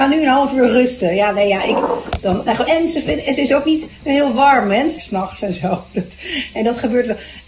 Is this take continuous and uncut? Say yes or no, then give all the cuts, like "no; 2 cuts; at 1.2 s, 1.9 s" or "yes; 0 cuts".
no; 2 cuts; at 2.7 s, 5.0 s